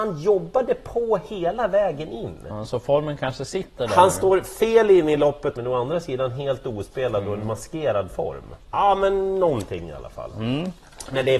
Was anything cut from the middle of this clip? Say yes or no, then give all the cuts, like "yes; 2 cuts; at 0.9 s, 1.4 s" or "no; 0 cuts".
yes; 2 cuts; at 5.5 s, 8.7 s